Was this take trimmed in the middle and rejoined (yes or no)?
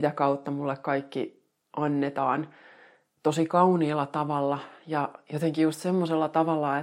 no